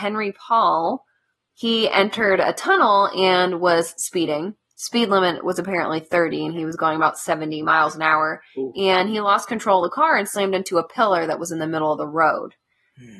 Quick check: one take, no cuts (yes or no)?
yes